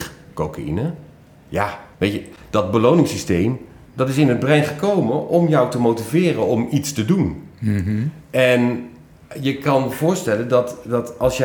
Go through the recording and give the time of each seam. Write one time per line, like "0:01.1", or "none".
0:01.9

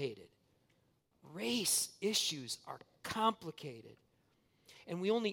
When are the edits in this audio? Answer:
none

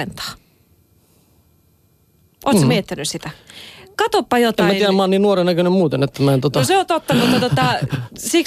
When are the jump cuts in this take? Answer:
none

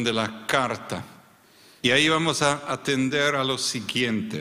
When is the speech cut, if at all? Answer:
0:01.8

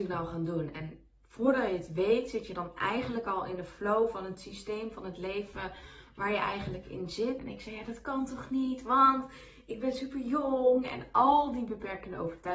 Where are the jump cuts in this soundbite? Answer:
0:07.4

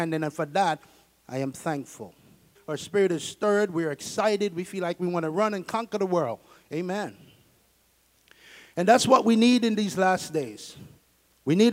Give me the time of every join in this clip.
0:02.6

